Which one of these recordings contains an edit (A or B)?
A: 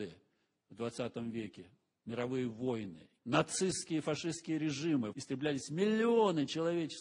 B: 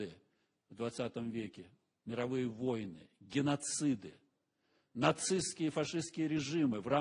A